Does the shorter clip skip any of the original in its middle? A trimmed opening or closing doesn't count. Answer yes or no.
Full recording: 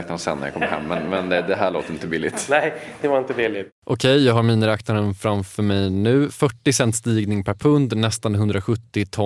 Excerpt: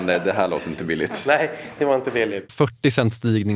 yes